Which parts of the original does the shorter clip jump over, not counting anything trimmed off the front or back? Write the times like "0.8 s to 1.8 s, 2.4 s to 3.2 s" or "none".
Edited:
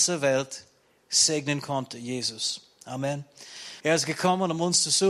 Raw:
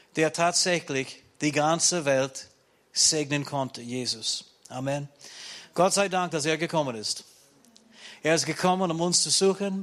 5.6 s to 8.2 s

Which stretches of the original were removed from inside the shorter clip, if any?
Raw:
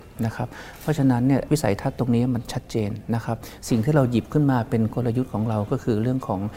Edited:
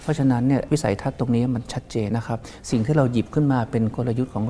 2.9 s to 3.1 s

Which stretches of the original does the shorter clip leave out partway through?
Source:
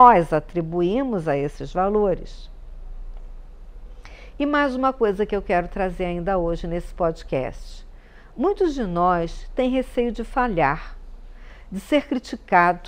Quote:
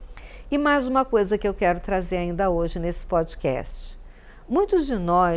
none

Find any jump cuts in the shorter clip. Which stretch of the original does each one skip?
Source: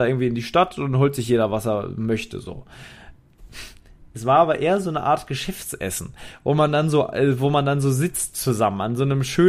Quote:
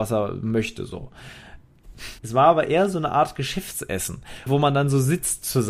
3.7 s to 4.1 s, 6.4 s to 7.4 s

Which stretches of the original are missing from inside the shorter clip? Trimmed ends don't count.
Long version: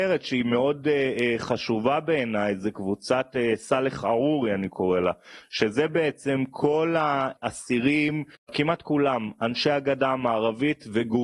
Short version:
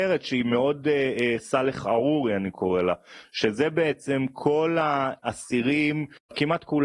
1.4 s to 3.6 s

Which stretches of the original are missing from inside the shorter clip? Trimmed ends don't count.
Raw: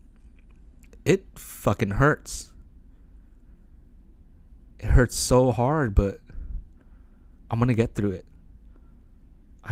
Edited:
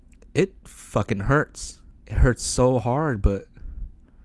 2.7 s to 4.7 s

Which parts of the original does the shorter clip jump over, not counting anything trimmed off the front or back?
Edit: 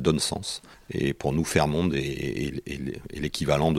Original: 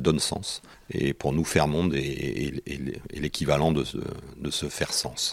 none

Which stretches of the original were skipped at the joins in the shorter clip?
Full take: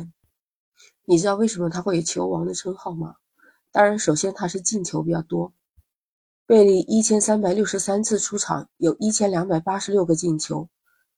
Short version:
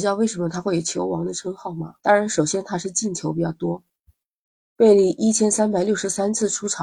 3.2 s to 3.7 s

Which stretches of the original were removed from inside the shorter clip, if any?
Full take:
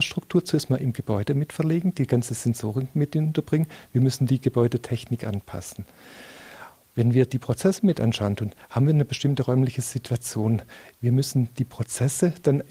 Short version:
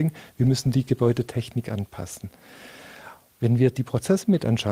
none

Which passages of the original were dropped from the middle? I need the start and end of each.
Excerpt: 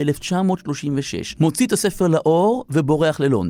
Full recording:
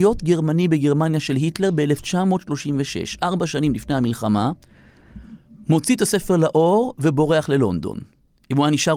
3.2 s to 5.7 s

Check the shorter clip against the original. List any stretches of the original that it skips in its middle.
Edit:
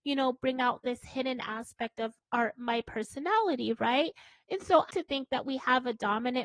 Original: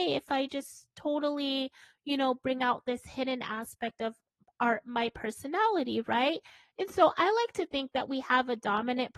4.2 s to 4.5 s, 7.2 s to 7.5 s

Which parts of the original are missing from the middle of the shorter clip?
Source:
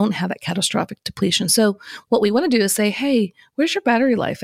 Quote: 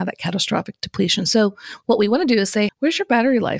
2.9 s to 3.4 s

